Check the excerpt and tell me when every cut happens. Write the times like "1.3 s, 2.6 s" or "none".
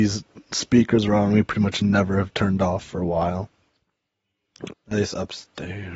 4.7 s